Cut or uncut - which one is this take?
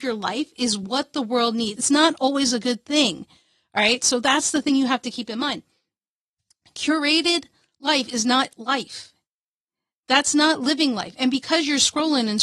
cut